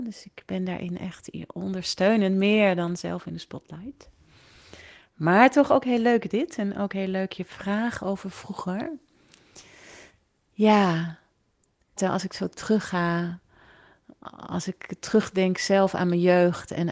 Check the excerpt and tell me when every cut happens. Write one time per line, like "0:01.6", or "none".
0:12.0